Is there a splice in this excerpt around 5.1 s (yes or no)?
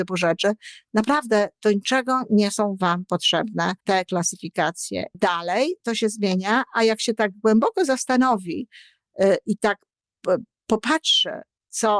yes